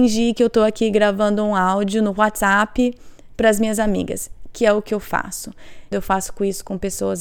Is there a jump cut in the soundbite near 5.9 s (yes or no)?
yes